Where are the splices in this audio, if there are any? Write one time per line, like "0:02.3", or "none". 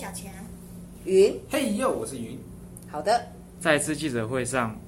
0:03.6